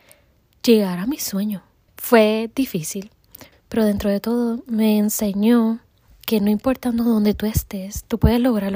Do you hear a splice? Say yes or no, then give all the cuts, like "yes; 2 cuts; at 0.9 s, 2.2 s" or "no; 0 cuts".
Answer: yes; 2 cuts; at 1.9 s, 3.5 s